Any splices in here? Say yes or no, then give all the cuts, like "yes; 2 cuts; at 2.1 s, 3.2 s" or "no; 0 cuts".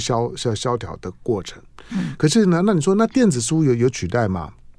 no; 0 cuts